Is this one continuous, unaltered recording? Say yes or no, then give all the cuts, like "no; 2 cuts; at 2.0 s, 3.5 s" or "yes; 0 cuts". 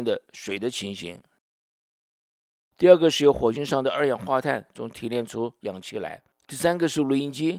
no; 1 cut; at 6.3 s